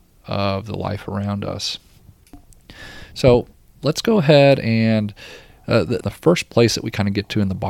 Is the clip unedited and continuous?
no; 1 cut; at 6.0 s

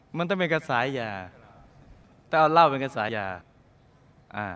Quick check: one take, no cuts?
no; 1 cut; at 3.1 s

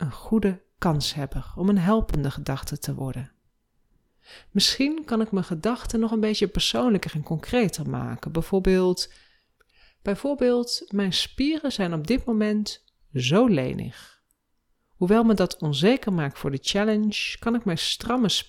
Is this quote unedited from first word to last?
yes; 0 cuts

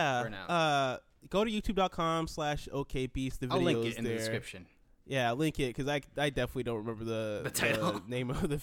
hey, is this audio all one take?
yes; 0 cuts

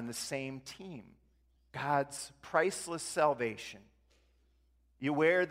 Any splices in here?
yes; 1 cut; at 1.5 s

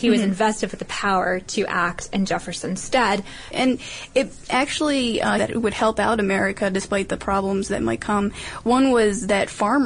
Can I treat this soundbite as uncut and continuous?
no; 2 cuts; at 3.5 s, 5.4 s

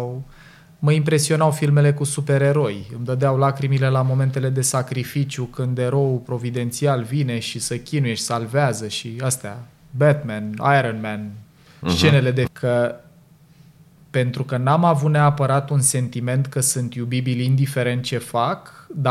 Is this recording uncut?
no; 1 cut; at 12.5 s

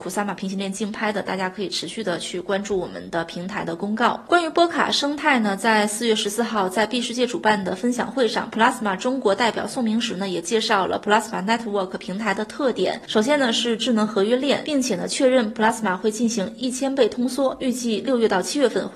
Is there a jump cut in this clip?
yes; 1 cut; at 14.6 s

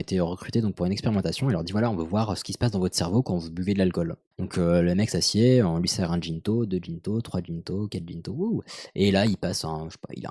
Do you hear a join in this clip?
yes; 1 cut; at 4.3 s

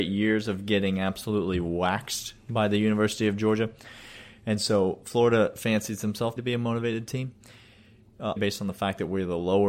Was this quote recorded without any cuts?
no; 2 cuts; at 6.4 s, 8.4 s

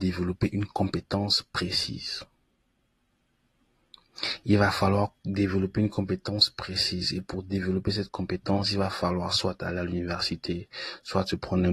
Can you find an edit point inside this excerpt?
no; 0 cuts

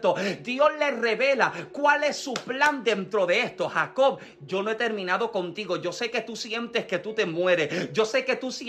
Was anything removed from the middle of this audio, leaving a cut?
no; 0 cuts

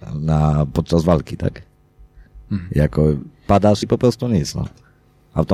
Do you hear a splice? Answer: yes; 1 cut; at 3.8 s

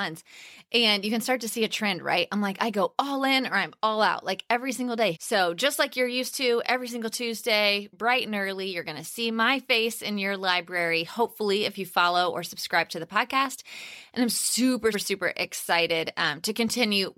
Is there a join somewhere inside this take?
yes; 2 cuts; at 5.1 s, 14.9 s

